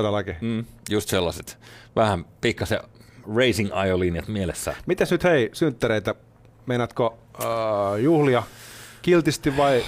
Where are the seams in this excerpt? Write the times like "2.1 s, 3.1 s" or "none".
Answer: none